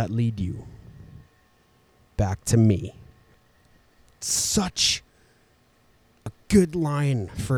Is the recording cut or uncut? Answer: uncut